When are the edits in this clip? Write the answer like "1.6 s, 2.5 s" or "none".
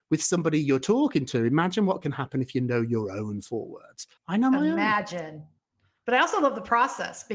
4.2 s